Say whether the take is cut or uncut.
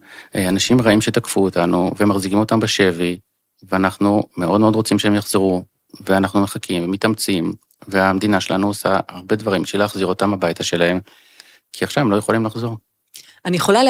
uncut